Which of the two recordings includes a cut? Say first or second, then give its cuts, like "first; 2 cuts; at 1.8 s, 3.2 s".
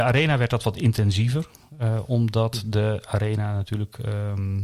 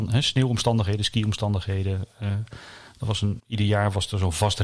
second; 1 cut; at 3.4 s